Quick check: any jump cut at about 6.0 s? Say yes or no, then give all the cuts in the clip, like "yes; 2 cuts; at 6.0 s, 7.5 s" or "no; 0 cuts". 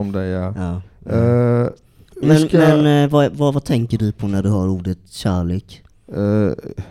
no; 1 cut; at 2.2 s